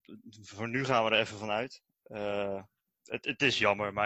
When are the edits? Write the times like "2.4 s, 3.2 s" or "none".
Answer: none